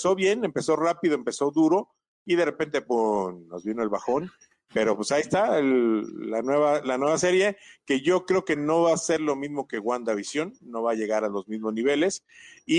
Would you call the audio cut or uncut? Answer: uncut